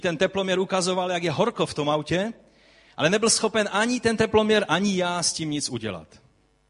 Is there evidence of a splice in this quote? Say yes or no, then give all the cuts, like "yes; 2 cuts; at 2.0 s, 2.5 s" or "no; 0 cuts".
no; 0 cuts